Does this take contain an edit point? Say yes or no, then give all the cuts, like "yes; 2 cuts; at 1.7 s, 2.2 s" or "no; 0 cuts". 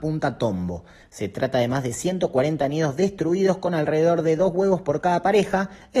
yes; 1 cut; at 1.0 s